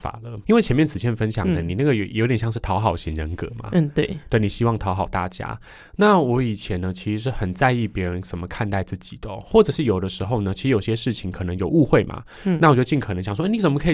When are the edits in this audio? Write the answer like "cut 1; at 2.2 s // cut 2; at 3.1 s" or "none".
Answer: none